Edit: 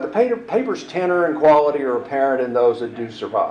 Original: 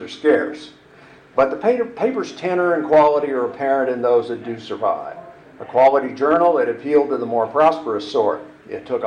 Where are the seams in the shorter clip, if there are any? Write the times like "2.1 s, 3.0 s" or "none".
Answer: none